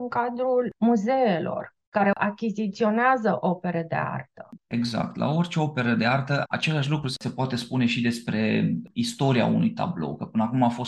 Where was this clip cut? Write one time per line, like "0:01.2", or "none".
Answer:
0:04.6
0:06.4